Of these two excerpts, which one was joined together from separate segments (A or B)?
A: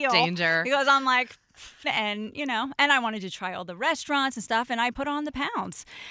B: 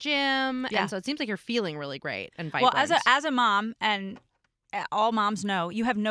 A